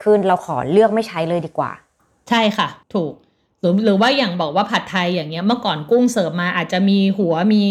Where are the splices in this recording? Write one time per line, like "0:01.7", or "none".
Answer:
0:02.8